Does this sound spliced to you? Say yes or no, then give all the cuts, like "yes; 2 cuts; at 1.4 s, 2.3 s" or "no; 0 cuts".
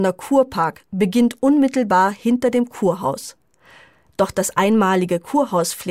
yes; 1 cut; at 4.1 s